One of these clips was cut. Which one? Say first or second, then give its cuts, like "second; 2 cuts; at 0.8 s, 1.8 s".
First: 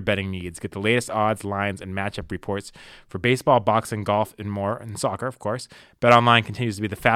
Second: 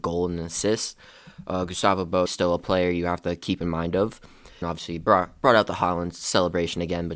second; 2 cuts; at 2.3 s, 4.6 s